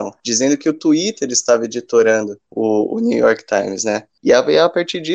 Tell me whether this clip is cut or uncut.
uncut